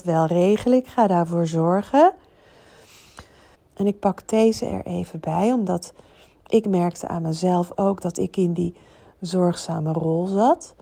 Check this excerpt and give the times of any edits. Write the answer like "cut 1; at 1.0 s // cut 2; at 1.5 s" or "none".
cut 1; at 3.5 s